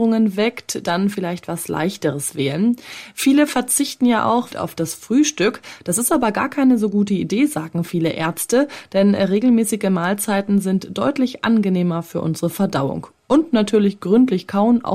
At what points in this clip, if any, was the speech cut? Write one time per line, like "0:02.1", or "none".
0:04.5